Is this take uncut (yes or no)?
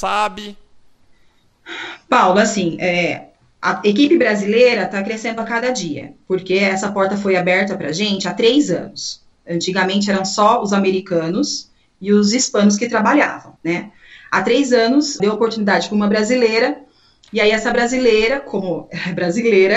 no